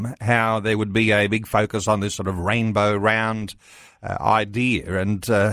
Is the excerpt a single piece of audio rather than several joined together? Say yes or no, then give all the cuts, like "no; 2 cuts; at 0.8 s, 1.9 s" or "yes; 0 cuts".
yes; 0 cuts